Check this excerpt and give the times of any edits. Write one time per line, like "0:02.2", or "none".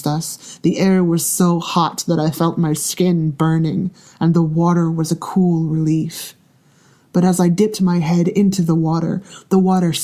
none